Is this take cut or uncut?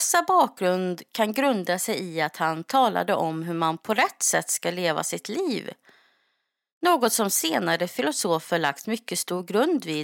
uncut